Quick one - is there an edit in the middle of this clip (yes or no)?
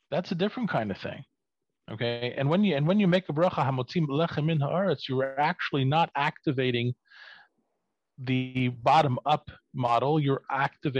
no